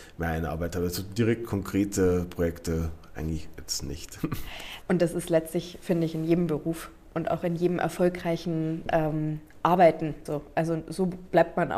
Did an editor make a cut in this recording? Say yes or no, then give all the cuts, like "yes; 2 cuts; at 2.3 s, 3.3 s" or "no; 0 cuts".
yes; 2 cuts; at 4.8 s, 10.3 s